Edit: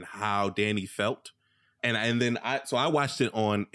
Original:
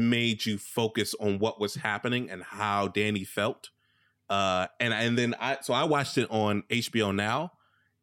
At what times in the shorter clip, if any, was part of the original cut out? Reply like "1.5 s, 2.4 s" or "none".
1.8 s